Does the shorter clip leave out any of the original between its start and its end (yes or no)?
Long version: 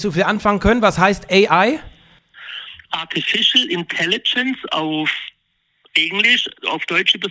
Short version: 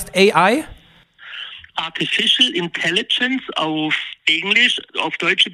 yes